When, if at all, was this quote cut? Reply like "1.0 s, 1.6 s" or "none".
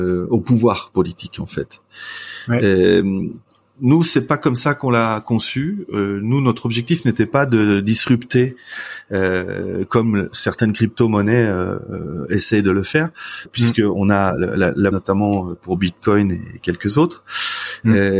13.5 s, 14.9 s